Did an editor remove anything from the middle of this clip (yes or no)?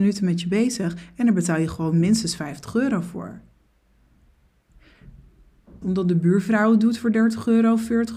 yes